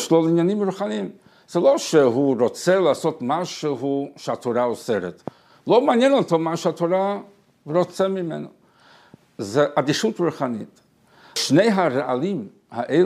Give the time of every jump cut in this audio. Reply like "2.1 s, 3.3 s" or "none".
none